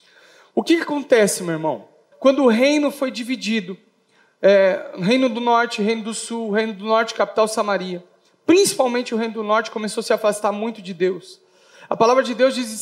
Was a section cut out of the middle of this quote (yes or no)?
yes